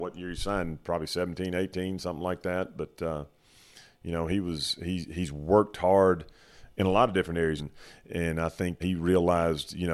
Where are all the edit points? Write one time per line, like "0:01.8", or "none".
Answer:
0:07.6
0:08.8